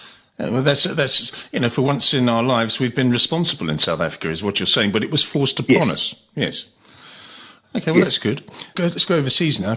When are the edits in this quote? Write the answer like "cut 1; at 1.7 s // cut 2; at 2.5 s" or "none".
cut 1; at 8.7 s